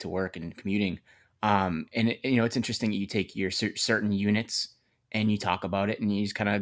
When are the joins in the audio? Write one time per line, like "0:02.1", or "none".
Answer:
none

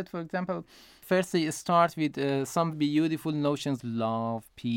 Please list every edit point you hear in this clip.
0:02.7
0:03.8

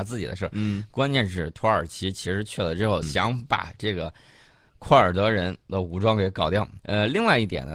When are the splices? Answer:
0:03.0
0:06.8

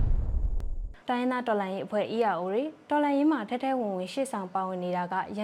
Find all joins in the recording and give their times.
0:01.0

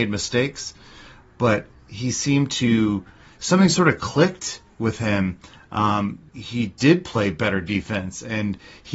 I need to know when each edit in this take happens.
0:06.3

